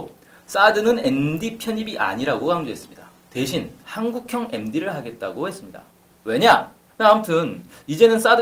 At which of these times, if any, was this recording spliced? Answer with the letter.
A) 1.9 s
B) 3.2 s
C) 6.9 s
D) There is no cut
C